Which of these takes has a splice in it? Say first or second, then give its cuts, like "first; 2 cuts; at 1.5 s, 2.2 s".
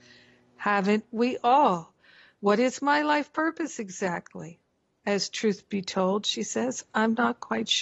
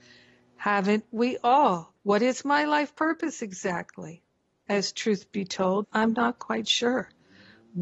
second; 2 cuts; at 2.0 s, 5.8 s